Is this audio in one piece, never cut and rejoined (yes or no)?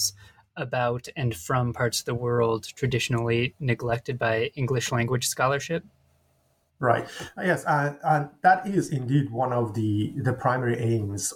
yes